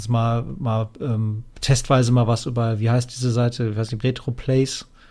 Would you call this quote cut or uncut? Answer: cut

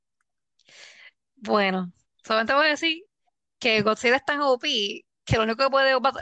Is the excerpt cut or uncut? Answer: cut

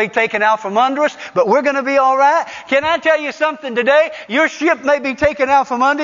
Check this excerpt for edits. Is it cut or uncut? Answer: uncut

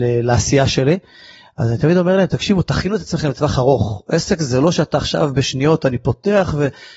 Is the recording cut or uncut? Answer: uncut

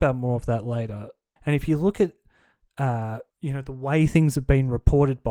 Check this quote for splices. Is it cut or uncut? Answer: cut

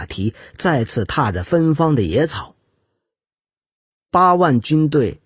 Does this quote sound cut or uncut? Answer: uncut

